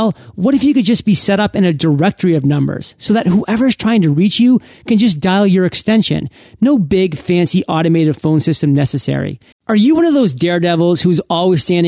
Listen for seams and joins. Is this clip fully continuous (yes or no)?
no